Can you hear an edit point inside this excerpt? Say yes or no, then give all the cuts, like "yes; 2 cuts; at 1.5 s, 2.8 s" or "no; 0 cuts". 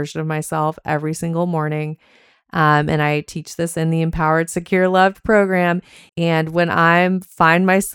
yes; 1 cut; at 6.1 s